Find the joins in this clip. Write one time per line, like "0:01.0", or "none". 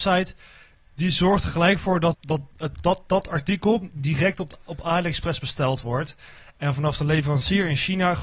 0:02.1